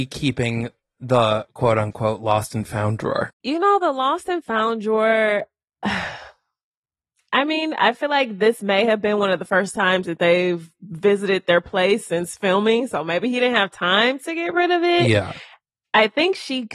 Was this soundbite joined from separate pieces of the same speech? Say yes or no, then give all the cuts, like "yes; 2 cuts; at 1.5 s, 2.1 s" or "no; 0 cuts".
no; 0 cuts